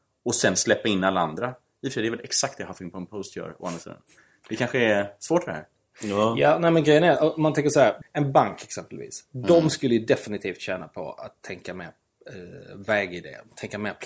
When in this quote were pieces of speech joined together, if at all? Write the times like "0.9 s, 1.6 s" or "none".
none